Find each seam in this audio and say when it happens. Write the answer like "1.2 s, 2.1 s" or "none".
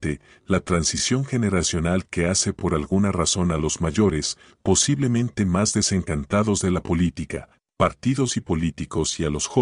none